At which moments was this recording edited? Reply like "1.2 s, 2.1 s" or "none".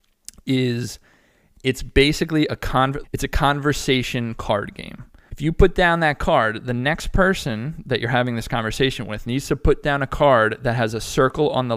3.0 s, 5.3 s